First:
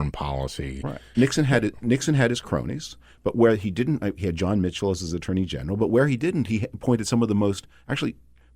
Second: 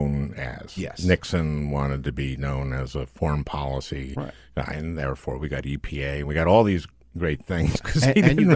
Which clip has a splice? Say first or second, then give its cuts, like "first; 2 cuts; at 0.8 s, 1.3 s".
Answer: first; 1 cut; at 1.1 s